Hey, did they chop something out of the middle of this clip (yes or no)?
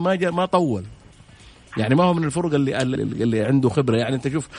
yes